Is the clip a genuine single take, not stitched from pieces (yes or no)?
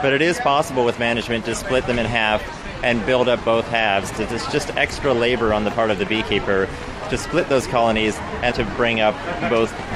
no